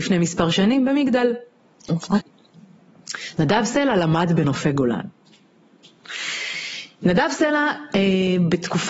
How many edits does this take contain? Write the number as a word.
one